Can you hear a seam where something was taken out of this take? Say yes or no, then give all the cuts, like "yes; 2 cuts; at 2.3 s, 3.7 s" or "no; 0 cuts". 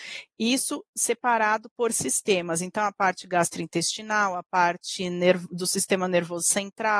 no; 0 cuts